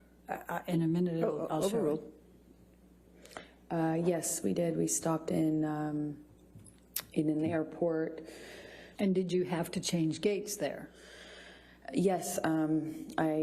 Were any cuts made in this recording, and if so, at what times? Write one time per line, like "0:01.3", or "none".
0:09.0